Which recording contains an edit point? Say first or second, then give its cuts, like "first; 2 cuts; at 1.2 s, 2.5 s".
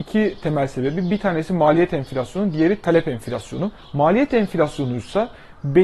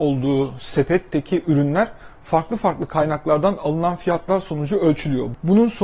first; 1 cut; at 3.8 s